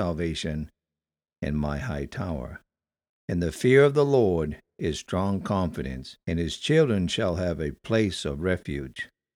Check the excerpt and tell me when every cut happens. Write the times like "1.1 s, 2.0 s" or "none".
3.1 s, 6.2 s

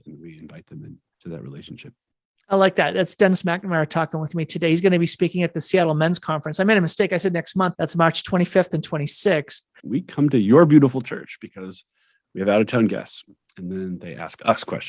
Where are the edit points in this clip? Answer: 7.7 s, 9.8 s

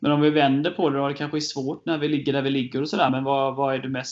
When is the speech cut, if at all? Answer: none

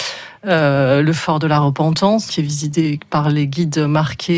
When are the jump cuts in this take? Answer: 2.3 s

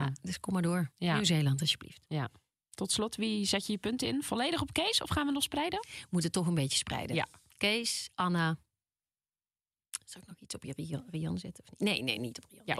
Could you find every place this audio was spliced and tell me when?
none

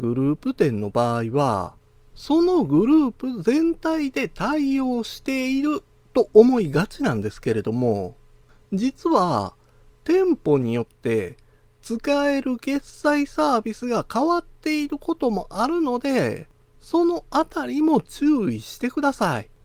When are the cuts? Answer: none

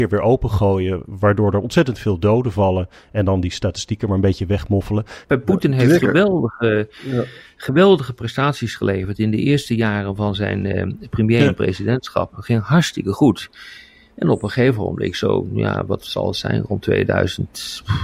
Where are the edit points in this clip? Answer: 5.2 s

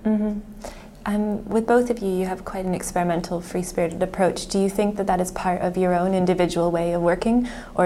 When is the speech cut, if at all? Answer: none

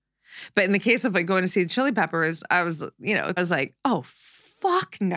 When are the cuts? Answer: 3.4 s

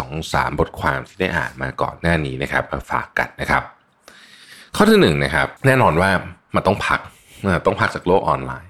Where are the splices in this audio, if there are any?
5.6 s

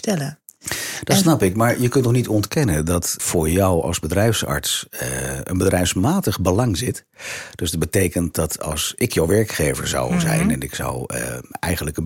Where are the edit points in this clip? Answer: 3.2 s

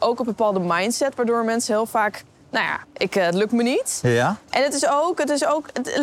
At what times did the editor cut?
2.8 s

